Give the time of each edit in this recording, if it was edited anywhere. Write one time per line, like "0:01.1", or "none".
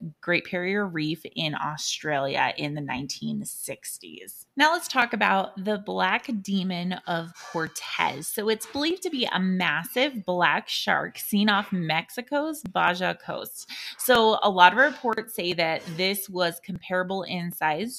0:04.5